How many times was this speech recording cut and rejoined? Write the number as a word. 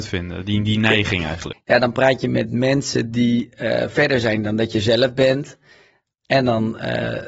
one